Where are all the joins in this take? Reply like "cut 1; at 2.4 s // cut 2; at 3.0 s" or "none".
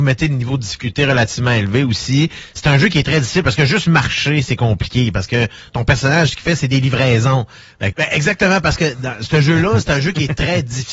cut 1; at 5.7 s // cut 2; at 7.9 s